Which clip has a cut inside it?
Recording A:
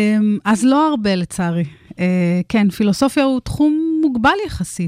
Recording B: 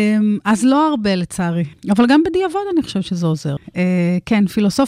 B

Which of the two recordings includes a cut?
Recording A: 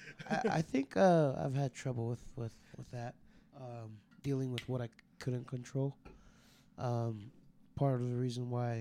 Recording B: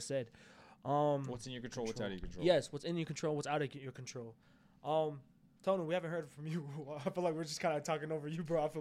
A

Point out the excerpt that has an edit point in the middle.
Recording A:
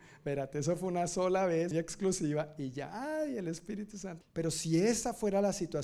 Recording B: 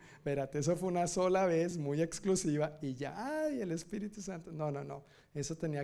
A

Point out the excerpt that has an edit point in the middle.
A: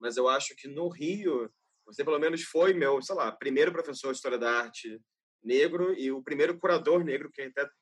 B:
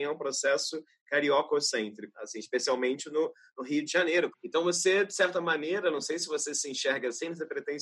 B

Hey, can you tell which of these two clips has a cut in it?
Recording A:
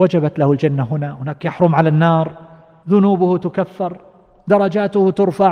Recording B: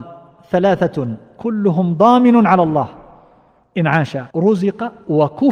B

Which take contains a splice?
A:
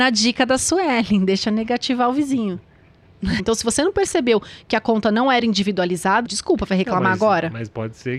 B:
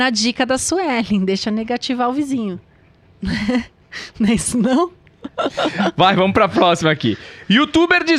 A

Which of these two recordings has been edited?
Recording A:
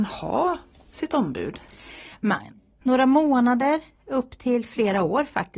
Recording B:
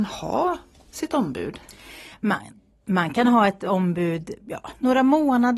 A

